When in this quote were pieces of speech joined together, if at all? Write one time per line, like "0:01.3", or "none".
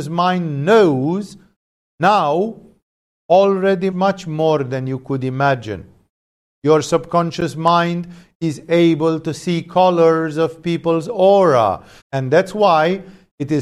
0:03.9
0:12.0